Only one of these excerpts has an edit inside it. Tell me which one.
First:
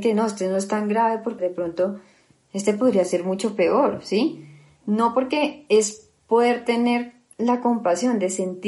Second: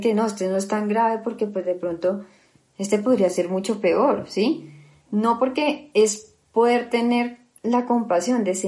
first; 1 cut; at 1.4 s

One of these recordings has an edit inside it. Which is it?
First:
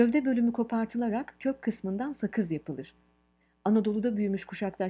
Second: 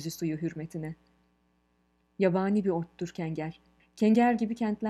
second; 1 cut; at 3.8 s

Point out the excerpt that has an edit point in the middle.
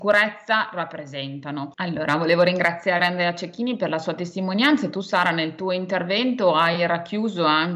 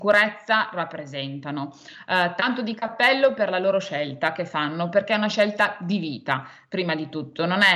first; 1 cut; at 1.7 s

